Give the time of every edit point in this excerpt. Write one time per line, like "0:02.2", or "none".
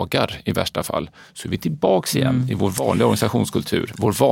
none